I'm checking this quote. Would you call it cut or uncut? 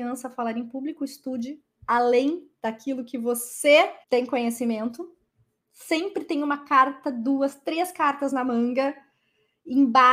cut